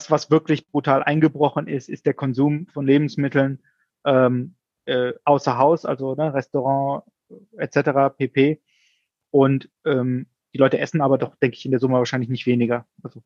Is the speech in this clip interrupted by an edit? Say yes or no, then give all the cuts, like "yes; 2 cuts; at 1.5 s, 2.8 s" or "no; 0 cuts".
no; 0 cuts